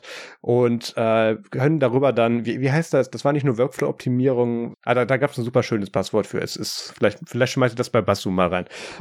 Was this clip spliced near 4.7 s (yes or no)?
yes